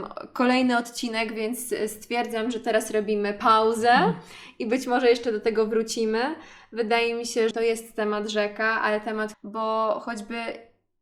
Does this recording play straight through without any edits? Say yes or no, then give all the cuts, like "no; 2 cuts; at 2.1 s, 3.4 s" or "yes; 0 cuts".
no; 2 cuts; at 7.5 s, 9.3 s